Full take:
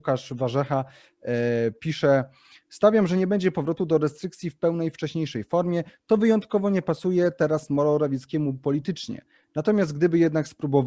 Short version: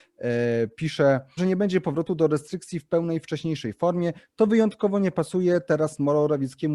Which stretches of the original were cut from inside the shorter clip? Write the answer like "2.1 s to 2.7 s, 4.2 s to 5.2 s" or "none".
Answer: 2.4 s to 3.1 s